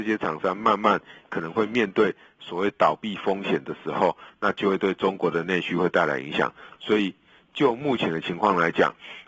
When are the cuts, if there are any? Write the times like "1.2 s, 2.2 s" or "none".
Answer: none